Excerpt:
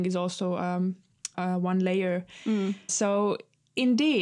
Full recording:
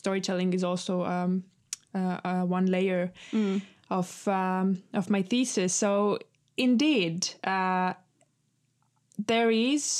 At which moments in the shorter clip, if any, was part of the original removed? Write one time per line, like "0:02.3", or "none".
0:01.3
0:02.9